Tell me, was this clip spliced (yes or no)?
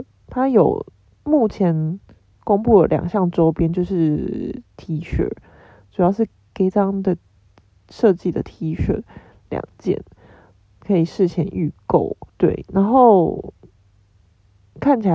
yes